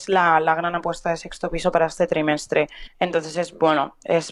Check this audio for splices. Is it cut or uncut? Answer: cut